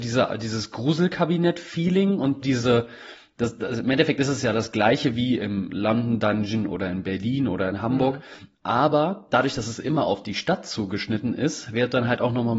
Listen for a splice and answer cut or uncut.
cut